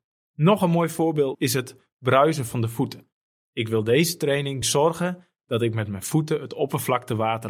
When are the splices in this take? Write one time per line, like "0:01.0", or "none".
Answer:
0:04.6